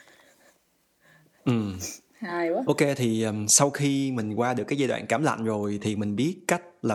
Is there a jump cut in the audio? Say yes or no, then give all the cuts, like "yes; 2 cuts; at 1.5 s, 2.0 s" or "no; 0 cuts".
no; 0 cuts